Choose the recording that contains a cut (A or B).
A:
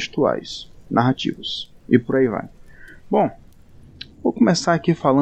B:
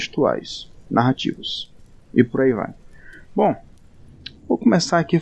A